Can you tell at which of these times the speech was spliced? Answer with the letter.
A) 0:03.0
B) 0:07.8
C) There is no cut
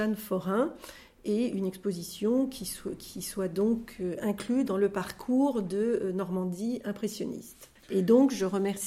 B